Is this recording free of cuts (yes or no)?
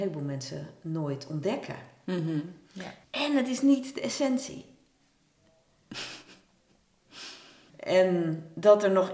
no